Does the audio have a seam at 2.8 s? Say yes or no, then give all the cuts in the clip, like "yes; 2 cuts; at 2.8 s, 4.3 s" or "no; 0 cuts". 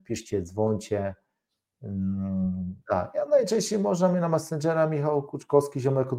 yes; 1 cut; at 2.8 s